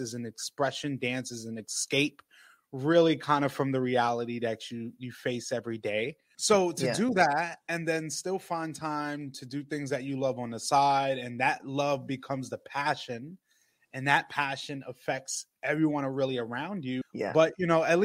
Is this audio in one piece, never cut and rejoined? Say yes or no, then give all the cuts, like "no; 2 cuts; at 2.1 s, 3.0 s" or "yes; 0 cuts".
no; 2 cuts; at 6.3 s, 17.0 s